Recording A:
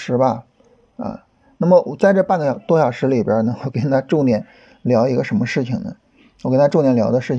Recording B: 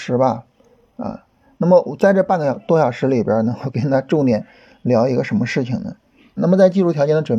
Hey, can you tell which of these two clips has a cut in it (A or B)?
B